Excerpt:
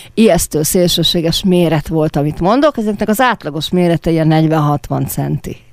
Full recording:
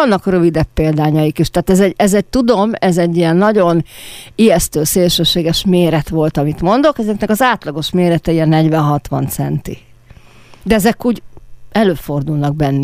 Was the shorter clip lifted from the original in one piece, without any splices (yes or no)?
yes